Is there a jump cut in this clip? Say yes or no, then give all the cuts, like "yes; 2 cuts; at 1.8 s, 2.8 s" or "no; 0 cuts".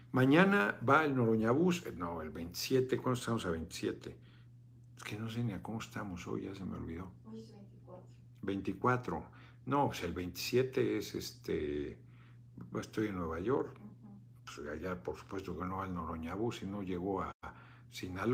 no; 0 cuts